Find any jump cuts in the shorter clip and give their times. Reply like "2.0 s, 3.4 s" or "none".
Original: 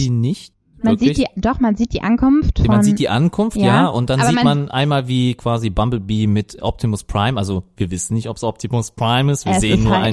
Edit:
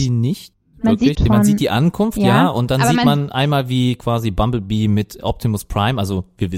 1.1 s